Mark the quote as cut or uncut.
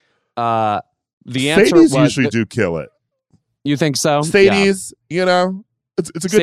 uncut